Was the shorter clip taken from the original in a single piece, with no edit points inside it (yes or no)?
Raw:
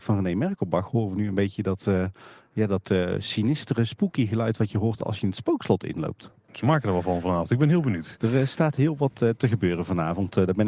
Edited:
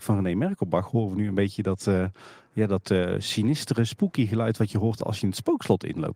yes